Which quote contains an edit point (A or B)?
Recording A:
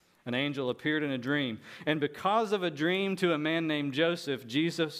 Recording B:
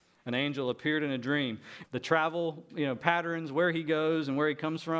B